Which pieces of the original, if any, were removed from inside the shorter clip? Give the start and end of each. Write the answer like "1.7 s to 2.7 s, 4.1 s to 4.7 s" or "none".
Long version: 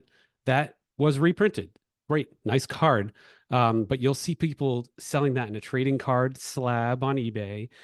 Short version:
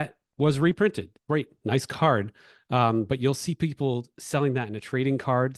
1.8 s to 2.0 s

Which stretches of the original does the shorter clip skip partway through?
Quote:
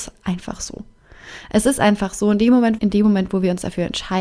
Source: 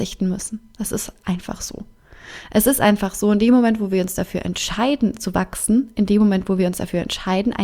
3.8 s to 5.9 s

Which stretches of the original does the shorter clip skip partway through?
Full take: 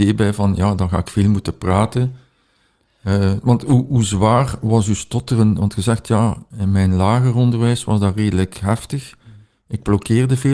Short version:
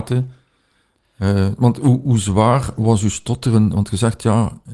none

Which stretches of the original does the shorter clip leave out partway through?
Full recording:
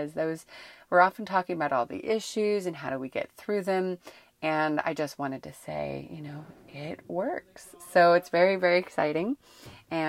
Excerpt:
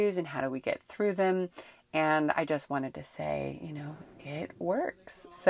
none

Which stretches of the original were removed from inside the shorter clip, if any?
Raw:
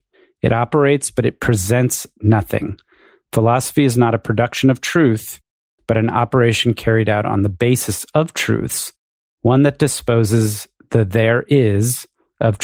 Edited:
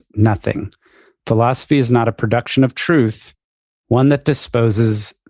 5.8 s to 9.2 s

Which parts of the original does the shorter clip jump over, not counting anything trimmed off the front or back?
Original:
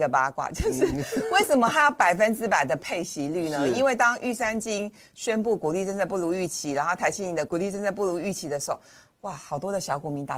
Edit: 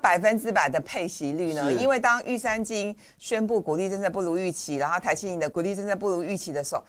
none

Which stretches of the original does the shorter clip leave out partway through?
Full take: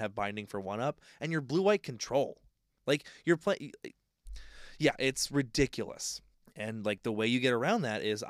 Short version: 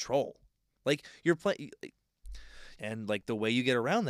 4.8 s to 6.5 s

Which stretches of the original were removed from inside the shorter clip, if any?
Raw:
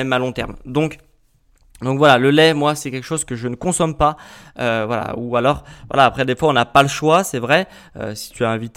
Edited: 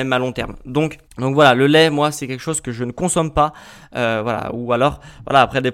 1.1 s to 1.7 s

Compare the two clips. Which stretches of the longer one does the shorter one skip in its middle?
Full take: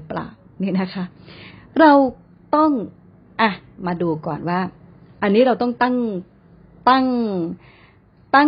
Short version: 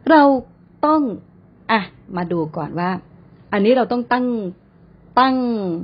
none

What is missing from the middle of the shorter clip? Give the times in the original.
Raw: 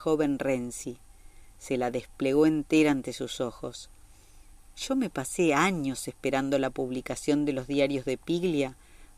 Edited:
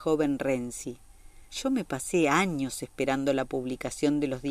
1.5 s to 4.7 s

